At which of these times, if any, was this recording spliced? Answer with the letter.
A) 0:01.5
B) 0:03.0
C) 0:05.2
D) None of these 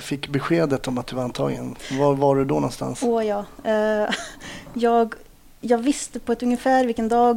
D